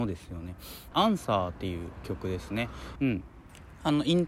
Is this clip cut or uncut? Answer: cut